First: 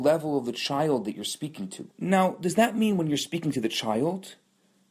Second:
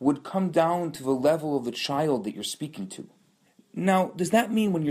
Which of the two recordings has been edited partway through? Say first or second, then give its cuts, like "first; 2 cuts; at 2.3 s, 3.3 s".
first; 1 cut; at 1.9 s